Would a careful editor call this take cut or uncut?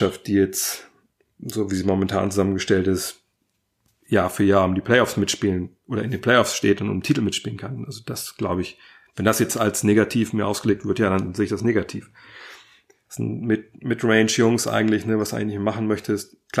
cut